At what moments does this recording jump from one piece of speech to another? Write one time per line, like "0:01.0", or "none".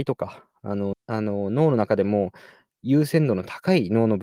0:00.9